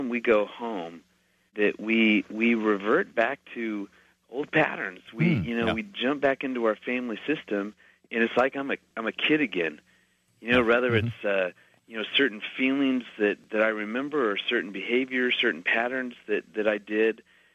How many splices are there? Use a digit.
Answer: 0